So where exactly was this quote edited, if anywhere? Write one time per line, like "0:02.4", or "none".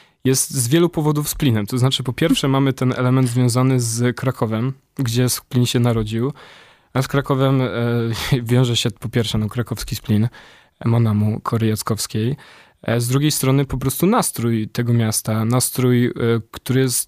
none

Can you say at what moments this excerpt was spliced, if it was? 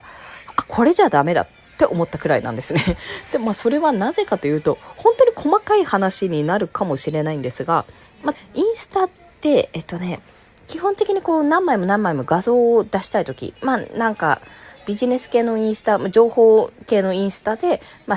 0:08.3

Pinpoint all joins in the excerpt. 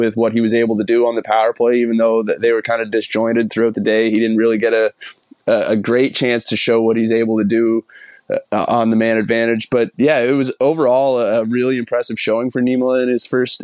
none

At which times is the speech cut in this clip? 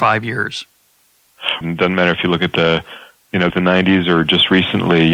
0:01.6
0:03.5

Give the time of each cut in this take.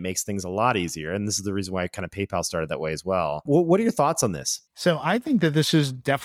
0:04.7

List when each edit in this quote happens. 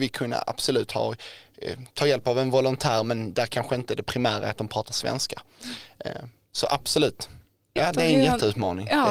0:07.8

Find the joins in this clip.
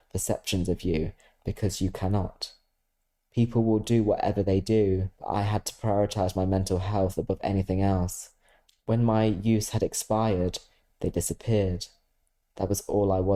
0:05.2
0:08.7

